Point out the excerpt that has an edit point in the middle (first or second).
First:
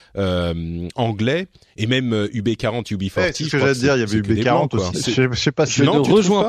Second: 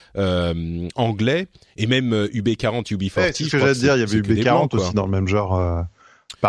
first